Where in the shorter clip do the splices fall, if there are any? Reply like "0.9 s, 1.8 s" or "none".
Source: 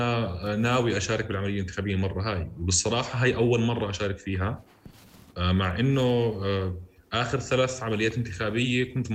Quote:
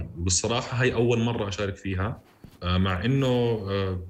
2.5 s